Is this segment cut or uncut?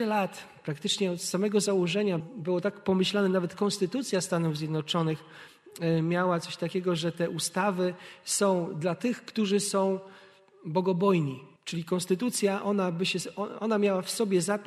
cut